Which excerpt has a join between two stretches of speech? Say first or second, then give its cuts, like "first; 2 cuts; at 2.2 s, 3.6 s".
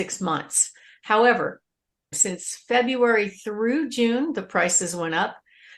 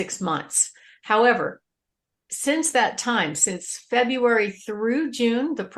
first; 1 cut; at 2.1 s